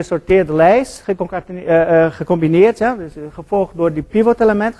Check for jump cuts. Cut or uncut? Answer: uncut